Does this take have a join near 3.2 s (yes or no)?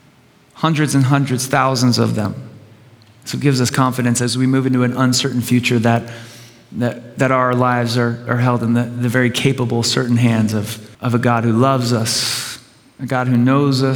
no